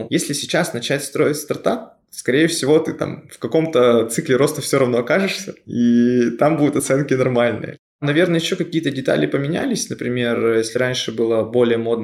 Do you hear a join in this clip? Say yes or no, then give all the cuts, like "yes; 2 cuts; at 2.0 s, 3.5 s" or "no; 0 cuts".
no; 0 cuts